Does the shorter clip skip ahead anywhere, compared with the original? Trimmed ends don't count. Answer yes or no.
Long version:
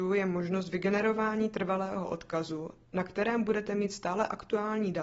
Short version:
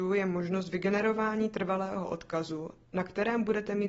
no